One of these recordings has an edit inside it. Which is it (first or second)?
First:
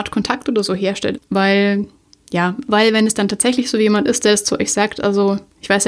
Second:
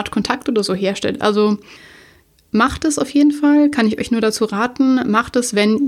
first